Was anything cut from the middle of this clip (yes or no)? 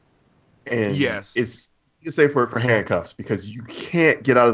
no